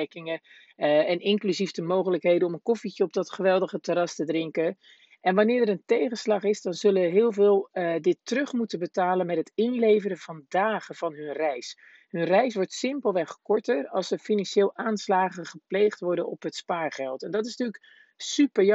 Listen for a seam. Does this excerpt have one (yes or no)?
no